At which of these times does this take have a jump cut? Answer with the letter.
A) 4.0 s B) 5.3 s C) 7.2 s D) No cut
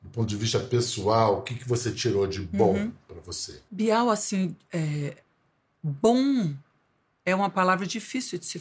D